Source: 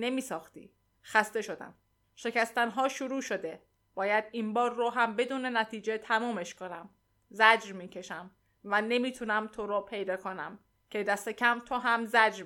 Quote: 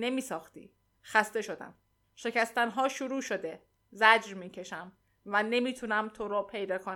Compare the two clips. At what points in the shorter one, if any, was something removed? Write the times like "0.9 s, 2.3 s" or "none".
3.8 s